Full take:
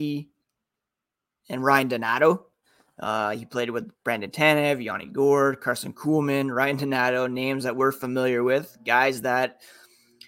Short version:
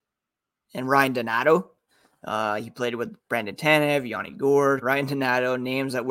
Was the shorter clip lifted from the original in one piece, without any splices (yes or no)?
no